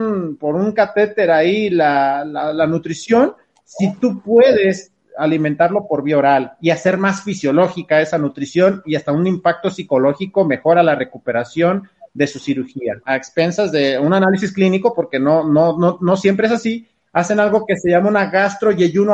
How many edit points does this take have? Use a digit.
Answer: 1